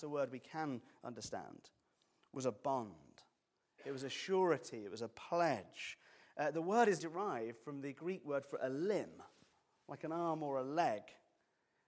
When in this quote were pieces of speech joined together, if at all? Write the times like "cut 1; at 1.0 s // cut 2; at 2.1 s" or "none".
cut 1; at 7.0 s